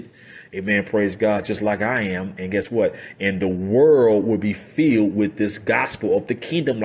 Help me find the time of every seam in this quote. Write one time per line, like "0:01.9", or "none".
none